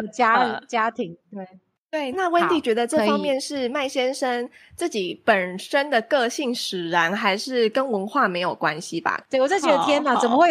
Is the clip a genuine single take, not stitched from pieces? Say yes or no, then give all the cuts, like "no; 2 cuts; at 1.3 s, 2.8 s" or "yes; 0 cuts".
no; 2 cuts; at 2.1 s, 9.2 s